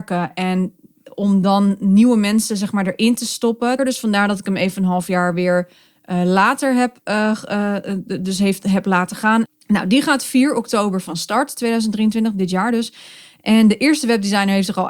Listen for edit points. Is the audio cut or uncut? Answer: cut